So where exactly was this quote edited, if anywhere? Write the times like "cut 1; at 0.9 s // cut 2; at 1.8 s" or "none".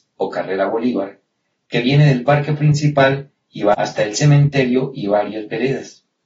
none